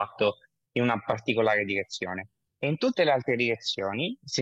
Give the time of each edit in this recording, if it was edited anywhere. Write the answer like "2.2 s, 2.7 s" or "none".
none